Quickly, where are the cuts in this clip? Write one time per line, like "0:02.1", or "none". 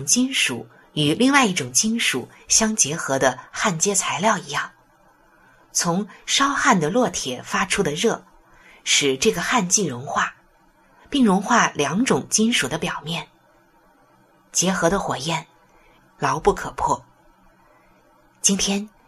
0:16.0

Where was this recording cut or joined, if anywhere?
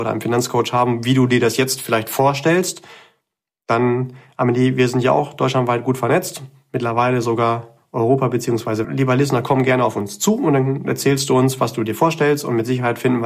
0:08.8

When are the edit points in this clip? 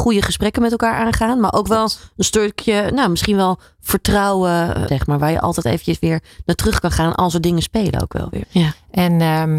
0:04.9
0:08.4

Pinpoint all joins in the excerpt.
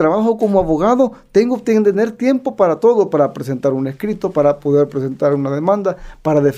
none

